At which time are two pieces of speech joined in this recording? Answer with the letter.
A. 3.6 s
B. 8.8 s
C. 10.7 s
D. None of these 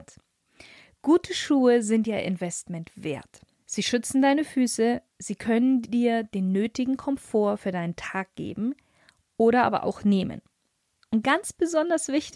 A